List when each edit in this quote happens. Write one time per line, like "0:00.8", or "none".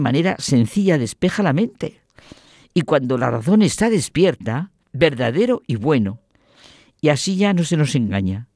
0:04.8